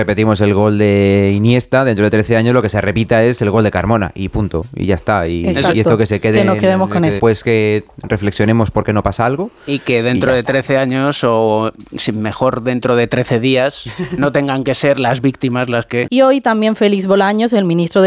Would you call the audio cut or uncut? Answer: cut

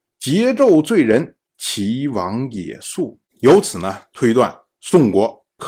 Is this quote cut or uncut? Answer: uncut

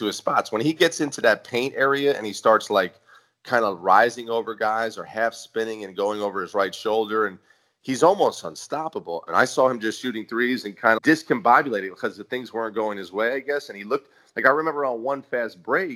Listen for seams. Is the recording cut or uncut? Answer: cut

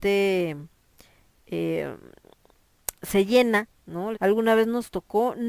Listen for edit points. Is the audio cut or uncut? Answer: cut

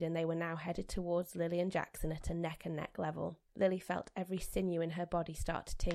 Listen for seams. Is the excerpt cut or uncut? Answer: cut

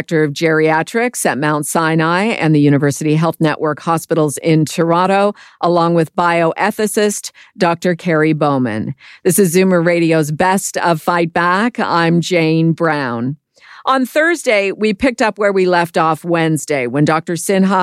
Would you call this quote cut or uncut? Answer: uncut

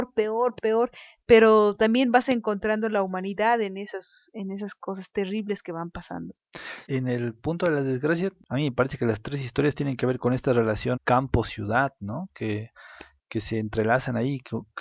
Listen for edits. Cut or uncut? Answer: cut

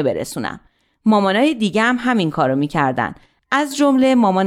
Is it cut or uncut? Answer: uncut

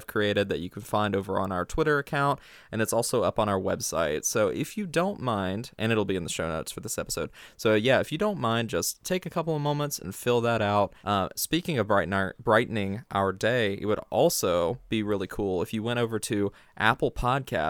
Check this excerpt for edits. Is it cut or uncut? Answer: cut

